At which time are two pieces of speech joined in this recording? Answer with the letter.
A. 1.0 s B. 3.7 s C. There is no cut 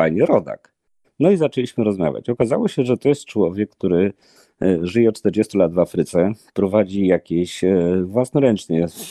A